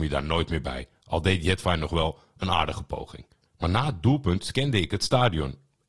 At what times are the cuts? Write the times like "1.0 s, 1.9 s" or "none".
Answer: 3.5 s